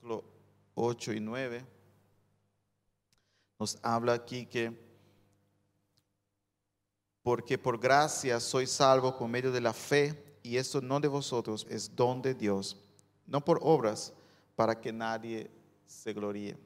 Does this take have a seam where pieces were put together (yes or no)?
yes